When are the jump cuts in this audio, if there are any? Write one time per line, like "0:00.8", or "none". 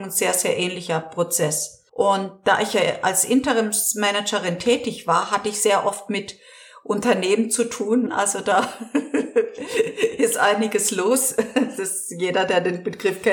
0:01.9
0:08.1

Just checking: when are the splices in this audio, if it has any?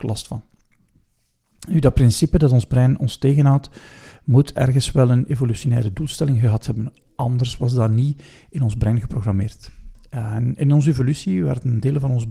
none

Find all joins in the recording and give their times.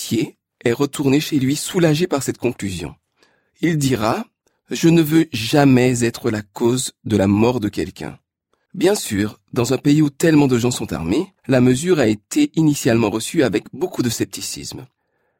0:08.7
0:11.4

